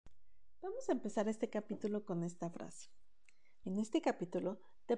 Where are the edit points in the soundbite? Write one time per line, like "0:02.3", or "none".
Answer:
0:03.6